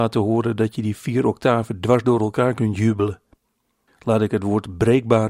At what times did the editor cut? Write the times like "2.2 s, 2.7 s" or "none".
3.9 s